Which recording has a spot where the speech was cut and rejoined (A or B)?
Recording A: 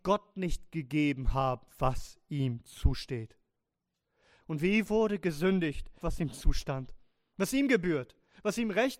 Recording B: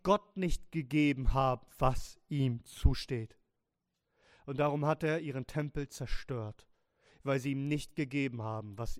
A